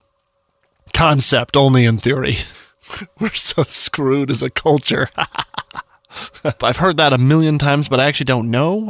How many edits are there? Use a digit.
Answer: 2